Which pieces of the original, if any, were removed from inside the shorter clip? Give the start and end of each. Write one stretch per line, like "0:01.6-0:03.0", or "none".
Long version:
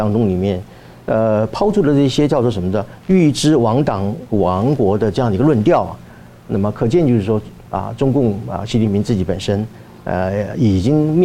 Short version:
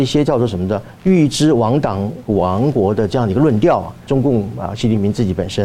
0:06.1-0:08.0